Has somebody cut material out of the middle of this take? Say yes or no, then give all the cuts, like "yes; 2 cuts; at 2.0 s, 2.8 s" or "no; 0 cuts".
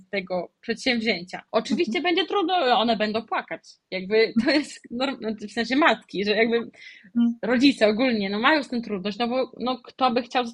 yes; 1 cut; at 1.5 s